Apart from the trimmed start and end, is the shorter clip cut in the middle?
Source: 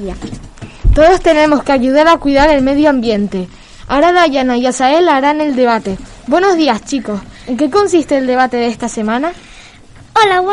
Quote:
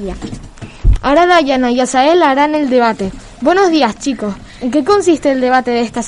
yes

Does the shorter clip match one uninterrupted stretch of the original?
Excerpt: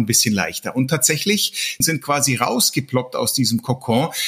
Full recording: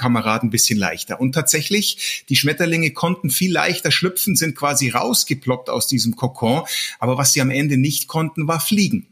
no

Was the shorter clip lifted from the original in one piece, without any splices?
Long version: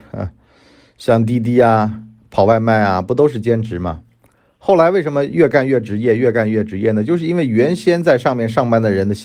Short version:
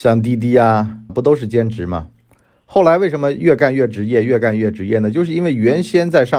no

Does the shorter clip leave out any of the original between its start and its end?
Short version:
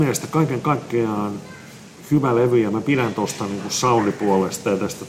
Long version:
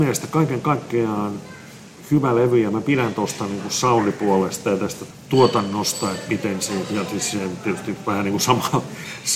no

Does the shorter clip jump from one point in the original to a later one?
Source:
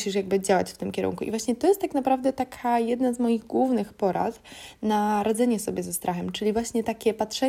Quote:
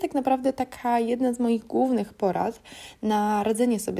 no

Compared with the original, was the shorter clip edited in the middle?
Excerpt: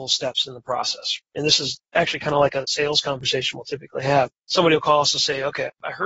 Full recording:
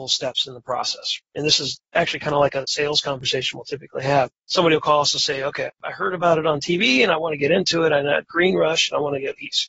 no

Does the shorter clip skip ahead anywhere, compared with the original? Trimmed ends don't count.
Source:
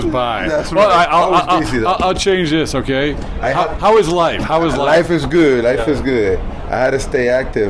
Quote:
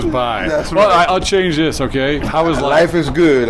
yes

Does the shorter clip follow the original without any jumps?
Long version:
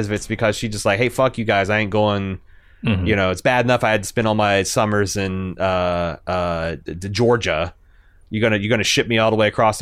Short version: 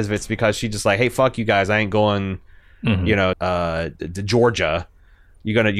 no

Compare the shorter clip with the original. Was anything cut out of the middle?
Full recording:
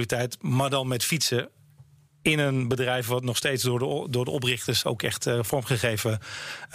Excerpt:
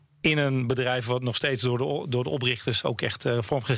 no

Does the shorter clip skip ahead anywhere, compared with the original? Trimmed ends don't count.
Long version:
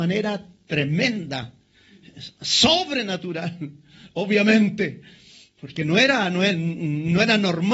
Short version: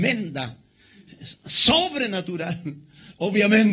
no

